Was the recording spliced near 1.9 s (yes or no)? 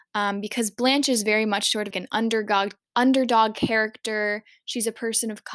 yes